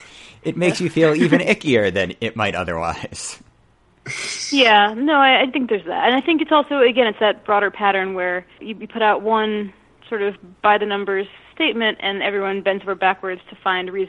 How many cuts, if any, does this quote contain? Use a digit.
1